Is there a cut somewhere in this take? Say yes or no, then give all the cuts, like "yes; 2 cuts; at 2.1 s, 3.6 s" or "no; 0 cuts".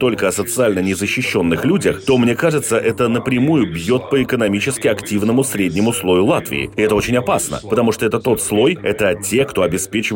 no; 0 cuts